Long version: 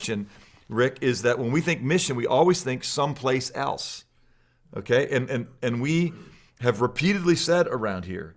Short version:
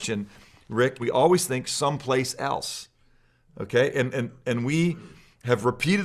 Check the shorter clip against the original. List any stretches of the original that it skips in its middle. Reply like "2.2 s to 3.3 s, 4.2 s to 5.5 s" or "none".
1.0 s to 2.2 s